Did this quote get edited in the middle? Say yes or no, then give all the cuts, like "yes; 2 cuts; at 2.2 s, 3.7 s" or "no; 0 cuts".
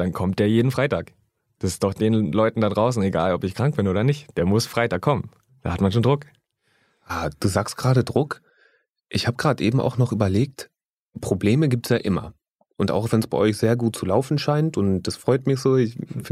no; 0 cuts